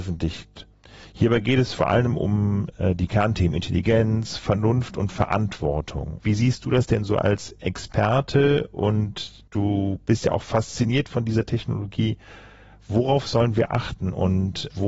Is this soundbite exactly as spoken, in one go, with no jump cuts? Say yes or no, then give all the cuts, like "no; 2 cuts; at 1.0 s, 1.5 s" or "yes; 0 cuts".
no; 1 cut; at 6.2 s